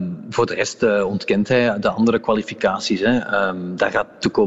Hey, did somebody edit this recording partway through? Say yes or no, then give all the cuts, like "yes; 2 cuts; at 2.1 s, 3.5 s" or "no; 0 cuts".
no; 0 cuts